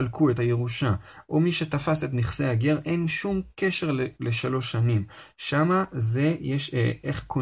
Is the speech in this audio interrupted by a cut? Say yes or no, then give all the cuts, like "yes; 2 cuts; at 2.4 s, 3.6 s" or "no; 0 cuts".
no; 0 cuts